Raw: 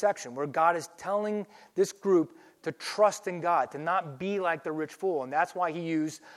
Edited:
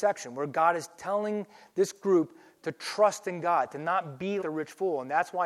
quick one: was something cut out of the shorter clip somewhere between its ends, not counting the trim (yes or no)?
yes